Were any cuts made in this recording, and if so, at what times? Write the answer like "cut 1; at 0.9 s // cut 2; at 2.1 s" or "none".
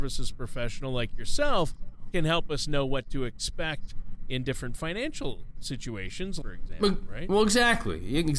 cut 1; at 6.4 s

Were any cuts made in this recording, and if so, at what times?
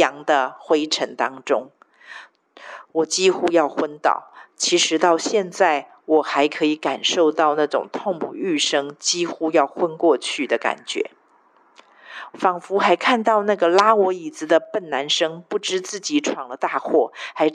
cut 1; at 12.3 s

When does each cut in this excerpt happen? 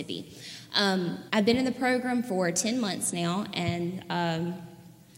cut 1; at 1.3 s

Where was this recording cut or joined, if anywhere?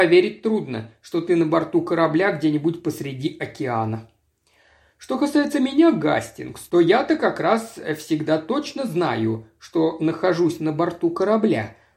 none

